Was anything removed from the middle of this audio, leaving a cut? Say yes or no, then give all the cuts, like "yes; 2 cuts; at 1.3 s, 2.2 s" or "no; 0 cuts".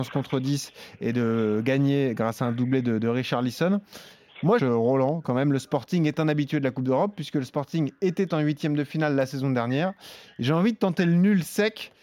yes; 1 cut; at 4.6 s